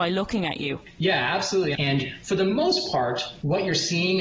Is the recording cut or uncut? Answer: cut